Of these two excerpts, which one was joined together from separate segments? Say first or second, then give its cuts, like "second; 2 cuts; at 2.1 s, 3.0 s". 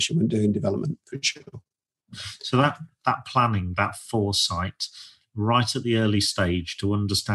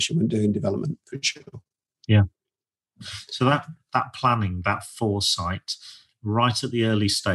first; 1 cut; at 2.0 s